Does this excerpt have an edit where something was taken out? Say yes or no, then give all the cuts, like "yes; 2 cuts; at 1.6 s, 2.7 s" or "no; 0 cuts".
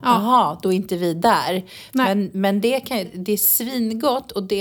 yes; 1 cut; at 3.0 s